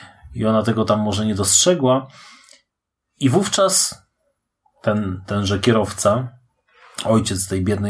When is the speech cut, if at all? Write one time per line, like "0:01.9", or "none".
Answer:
none

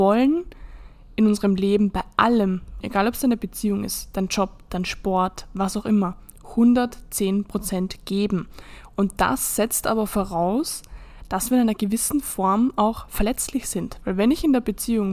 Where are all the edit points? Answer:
0:02.8

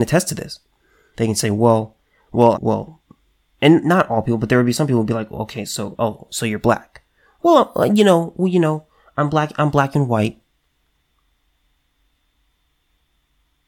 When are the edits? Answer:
0:02.5

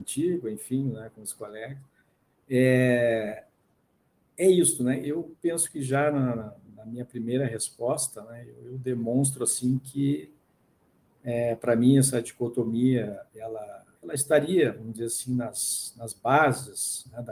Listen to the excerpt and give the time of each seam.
0:13.9

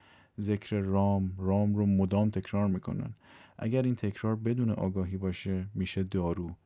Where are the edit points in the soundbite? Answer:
0:01.4

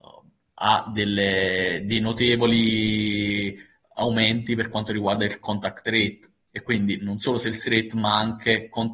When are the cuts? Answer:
none

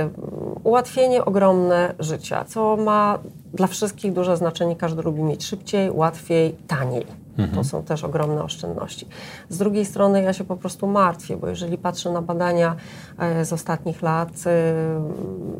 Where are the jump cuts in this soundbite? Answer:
none

